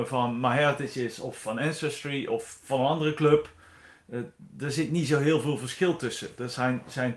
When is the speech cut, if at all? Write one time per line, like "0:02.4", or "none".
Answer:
none